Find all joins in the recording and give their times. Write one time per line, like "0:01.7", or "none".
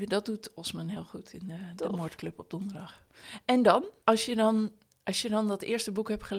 0:04.0